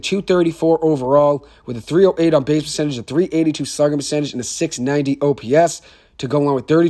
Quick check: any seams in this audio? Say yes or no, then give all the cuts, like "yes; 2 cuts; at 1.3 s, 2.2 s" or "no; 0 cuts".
no; 0 cuts